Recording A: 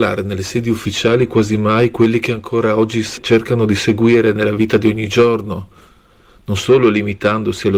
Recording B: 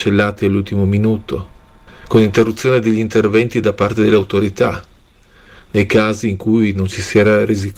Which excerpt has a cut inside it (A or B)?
B